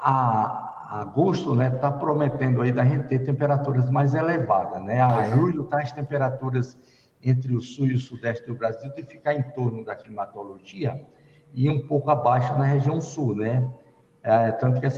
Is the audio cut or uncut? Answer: uncut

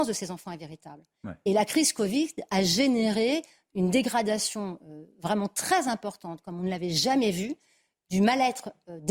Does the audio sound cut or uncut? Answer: uncut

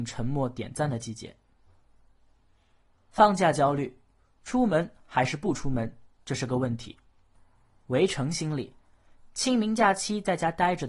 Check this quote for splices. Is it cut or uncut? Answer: uncut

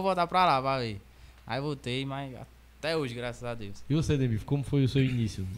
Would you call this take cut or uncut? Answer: cut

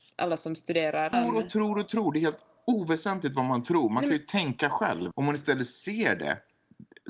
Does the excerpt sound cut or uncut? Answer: cut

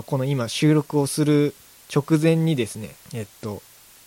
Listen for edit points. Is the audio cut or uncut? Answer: cut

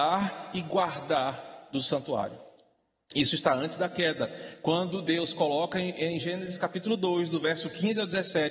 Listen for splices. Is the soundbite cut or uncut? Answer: uncut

